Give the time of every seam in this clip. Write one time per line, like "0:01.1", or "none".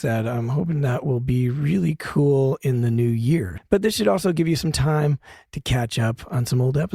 0:03.6